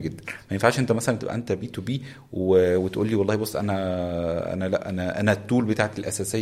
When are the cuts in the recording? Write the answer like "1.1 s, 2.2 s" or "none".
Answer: none